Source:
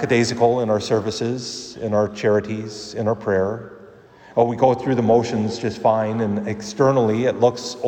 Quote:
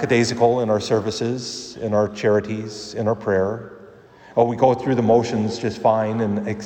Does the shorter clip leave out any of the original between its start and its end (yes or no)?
no